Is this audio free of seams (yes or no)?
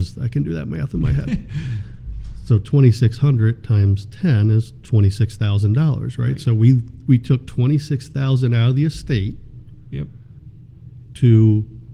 yes